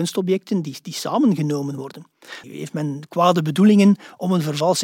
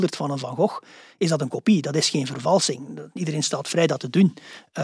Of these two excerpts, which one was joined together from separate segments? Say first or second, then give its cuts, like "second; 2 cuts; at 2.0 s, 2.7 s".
first; 1 cut; at 2.4 s